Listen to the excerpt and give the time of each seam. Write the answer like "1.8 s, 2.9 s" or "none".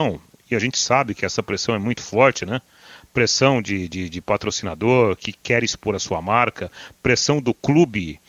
5.2 s